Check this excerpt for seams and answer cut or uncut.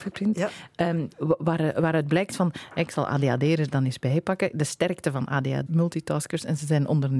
cut